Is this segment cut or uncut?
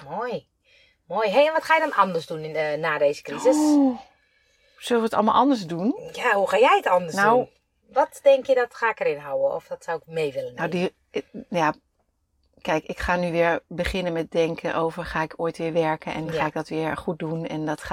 uncut